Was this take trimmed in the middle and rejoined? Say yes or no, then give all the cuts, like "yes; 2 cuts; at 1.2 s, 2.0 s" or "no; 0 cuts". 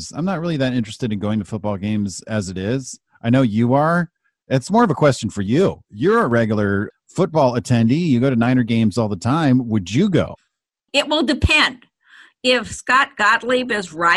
no; 0 cuts